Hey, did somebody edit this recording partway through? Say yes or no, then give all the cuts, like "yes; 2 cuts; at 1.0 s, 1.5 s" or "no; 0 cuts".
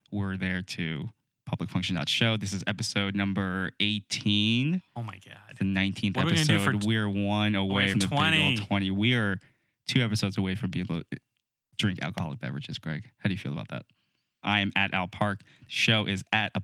yes; 2 cuts; at 7.9 s, 14.4 s